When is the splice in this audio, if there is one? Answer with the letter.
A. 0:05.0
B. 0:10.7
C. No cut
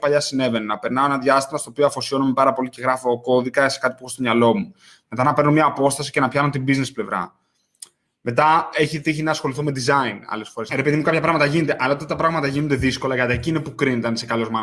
B